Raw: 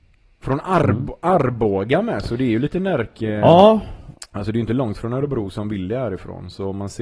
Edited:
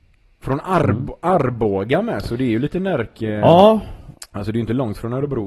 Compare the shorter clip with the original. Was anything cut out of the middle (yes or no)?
no